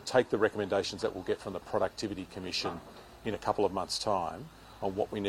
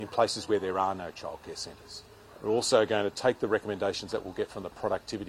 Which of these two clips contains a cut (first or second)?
second